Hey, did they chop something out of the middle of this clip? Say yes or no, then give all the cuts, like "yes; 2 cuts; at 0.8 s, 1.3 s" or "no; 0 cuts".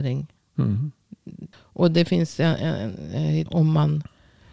yes; 2 cuts; at 1.5 s, 3.5 s